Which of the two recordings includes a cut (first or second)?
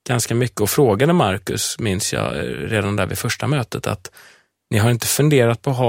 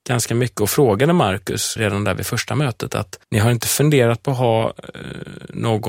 second